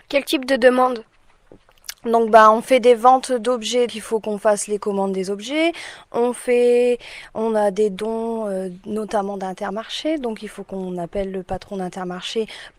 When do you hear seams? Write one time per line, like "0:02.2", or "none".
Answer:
0:03.9